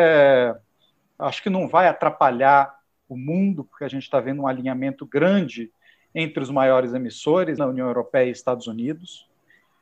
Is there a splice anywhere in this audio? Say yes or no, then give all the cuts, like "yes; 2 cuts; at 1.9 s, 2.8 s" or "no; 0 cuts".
yes; 2 cuts; at 1.2 s, 7.6 s